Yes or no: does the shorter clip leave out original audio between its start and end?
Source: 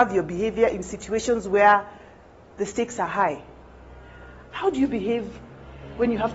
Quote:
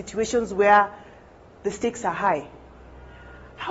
no